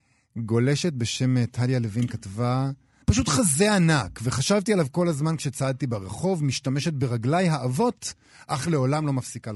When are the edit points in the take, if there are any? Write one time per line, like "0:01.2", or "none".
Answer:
0:03.0